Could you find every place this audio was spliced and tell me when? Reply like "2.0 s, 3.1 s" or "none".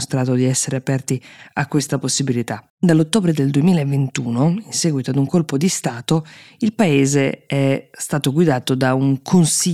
2.7 s